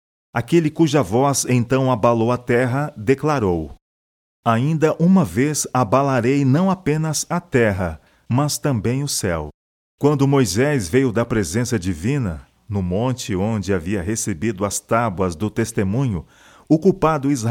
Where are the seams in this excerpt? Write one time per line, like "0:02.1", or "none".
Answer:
0:09.8